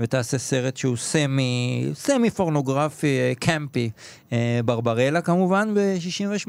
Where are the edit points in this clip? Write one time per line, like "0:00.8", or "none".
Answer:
none